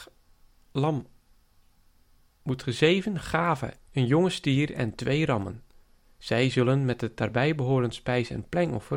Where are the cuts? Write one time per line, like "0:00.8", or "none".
0:03.8